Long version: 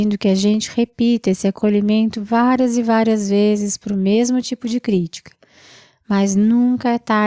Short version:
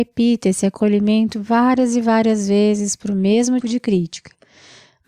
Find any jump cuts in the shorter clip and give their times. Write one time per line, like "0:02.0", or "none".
0:03.6